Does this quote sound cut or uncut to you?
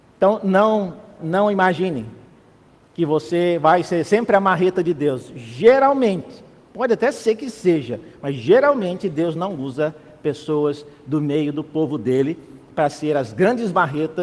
cut